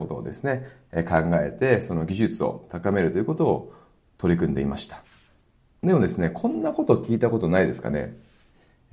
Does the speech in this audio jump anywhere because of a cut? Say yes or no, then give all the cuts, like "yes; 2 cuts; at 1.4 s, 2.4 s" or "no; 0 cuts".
no; 0 cuts